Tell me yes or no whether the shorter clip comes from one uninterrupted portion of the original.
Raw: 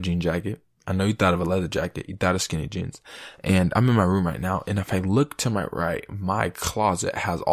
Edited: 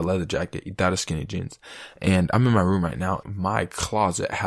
no